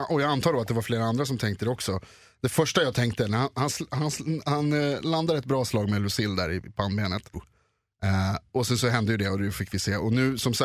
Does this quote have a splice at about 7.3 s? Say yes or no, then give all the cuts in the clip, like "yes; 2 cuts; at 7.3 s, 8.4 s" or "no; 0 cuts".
yes; 1 cut; at 7.3 s